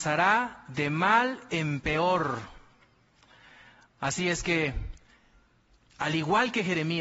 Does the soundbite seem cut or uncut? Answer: uncut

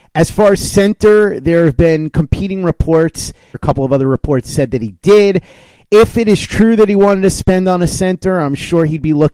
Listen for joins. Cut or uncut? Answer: cut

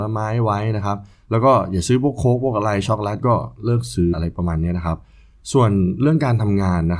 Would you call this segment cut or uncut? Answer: cut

